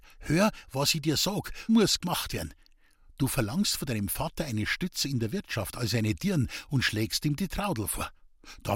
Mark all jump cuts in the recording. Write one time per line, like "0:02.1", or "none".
0:01.7